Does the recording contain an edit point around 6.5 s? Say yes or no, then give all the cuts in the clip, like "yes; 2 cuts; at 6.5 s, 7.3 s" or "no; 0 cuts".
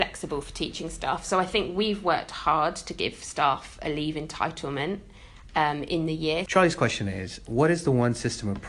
yes; 1 cut; at 6.5 s